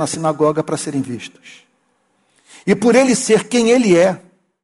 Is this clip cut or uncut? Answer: uncut